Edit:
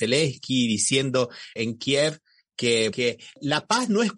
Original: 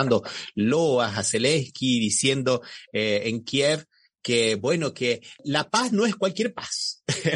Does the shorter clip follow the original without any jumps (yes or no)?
no